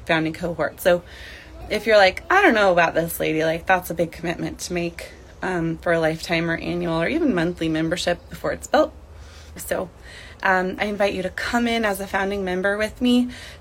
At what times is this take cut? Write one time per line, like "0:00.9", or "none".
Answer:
0:09.6
0:10.8